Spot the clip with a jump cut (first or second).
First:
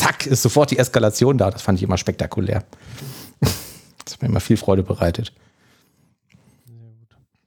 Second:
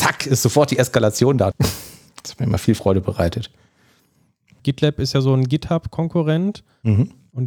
second